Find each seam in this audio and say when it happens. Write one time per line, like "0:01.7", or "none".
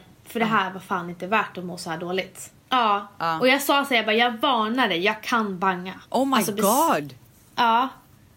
0:02.7
0:06.0
0:07.2